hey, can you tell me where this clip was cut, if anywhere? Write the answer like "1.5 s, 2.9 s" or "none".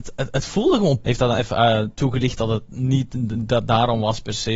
1.0 s